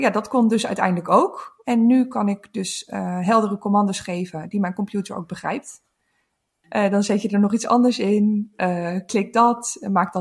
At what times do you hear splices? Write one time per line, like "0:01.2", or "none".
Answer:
0:06.6